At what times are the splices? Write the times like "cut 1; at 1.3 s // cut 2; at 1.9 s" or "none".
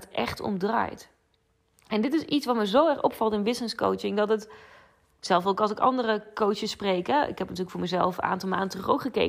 none